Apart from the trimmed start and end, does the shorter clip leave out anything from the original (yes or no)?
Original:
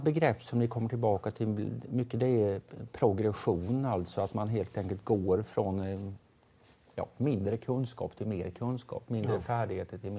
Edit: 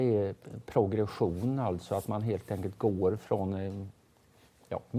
no